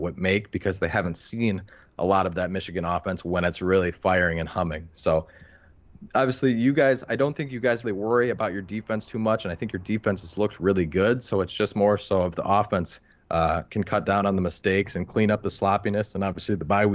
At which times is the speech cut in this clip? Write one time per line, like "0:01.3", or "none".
0:07.8